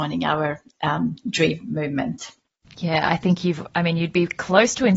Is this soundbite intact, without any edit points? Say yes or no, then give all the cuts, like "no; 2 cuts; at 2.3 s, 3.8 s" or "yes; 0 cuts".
yes; 0 cuts